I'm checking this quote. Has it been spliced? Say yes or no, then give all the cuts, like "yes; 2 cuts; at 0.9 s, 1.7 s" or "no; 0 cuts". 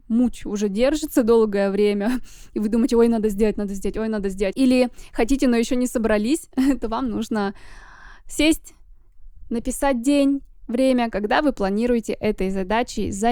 yes; 1 cut; at 4.5 s